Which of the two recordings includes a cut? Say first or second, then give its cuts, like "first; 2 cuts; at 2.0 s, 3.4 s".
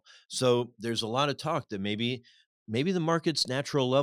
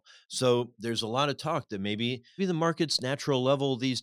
second; 1 cut; at 2.4 s